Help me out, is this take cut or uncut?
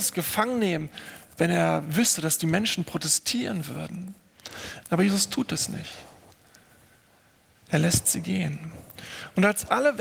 cut